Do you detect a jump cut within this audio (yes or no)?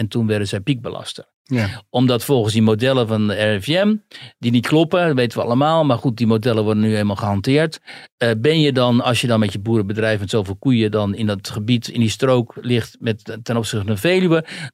no